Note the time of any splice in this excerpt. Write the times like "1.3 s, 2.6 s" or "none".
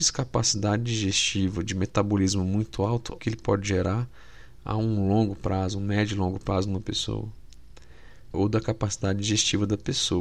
3.2 s, 8.3 s